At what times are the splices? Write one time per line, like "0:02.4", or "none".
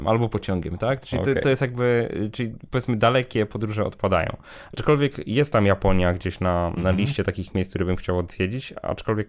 0:06.8